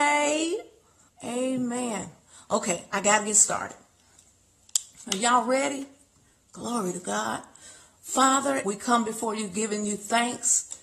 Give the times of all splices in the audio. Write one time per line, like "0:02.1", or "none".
0:01.1
0:08.6